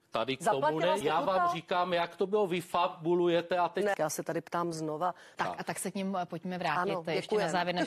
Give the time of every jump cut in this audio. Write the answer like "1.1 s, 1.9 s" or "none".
1.0 s, 3.9 s, 5.3 s